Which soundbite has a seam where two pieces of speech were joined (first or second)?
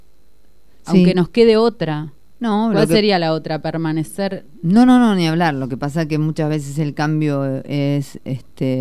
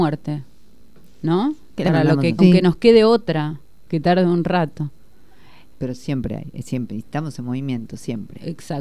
second